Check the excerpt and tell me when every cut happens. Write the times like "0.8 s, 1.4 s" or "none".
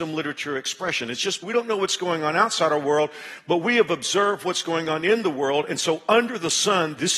1.4 s